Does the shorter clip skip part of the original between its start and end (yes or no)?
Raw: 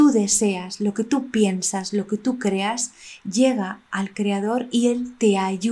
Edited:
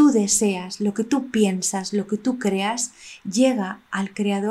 no